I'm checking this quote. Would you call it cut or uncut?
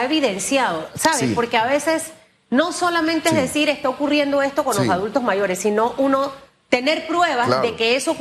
uncut